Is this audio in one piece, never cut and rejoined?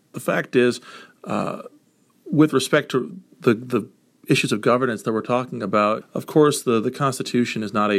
no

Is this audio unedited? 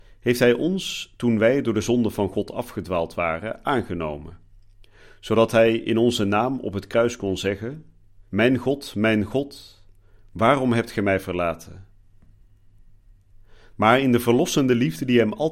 no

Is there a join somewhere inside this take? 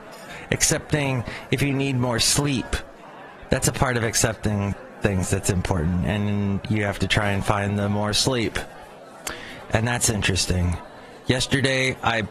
no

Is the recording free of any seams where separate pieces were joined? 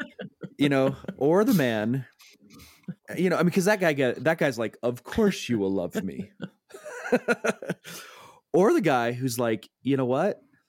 yes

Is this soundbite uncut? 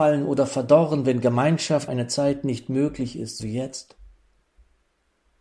no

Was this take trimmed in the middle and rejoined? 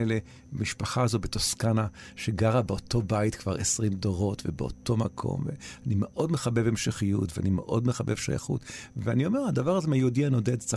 no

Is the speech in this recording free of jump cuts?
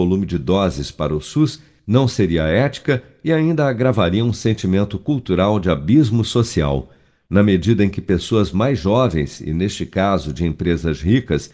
yes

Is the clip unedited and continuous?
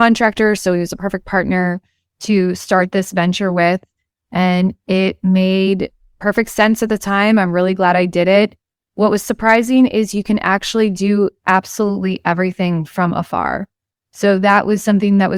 yes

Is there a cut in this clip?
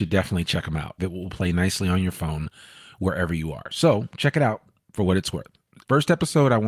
yes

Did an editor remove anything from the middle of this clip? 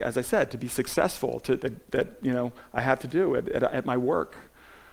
yes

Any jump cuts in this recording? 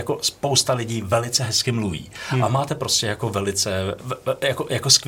yes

